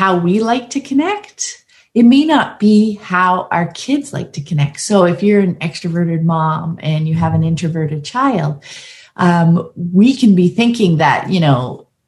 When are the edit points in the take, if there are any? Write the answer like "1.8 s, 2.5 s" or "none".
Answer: none